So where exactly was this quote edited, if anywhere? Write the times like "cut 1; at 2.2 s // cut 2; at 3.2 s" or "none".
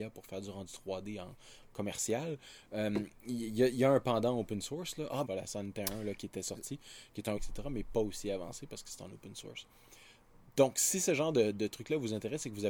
cut 1; at 5.3 s // cut 2; at 7.4 s